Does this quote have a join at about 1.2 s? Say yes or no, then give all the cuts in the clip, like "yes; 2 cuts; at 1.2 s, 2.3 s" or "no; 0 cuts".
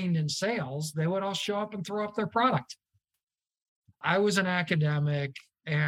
no; 1 cut; at 3.9 s